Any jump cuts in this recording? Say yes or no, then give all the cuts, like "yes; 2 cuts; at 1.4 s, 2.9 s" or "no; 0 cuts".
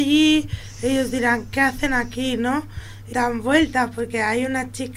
yes; 1 cut; at 3.1 s